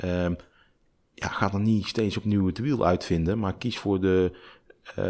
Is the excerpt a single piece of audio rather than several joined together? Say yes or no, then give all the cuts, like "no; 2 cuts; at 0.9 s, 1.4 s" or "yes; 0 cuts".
yes; 0 cuts